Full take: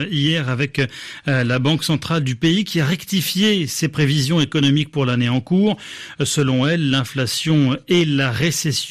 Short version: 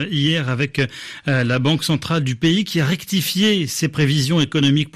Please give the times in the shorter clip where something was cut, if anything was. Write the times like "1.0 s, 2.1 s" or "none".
none